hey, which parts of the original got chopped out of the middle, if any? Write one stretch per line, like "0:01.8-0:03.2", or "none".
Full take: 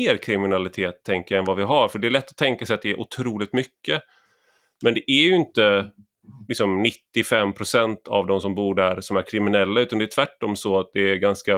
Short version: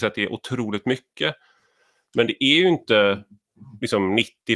none

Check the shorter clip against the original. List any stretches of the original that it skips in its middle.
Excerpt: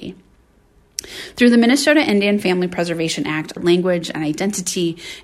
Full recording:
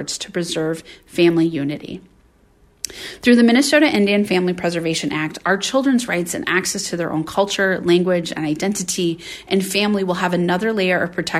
0:05.4-0:07.8

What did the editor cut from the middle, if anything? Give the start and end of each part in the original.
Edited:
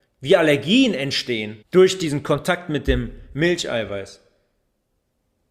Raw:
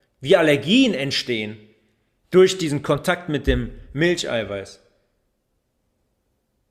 0:01.6-0:02.2

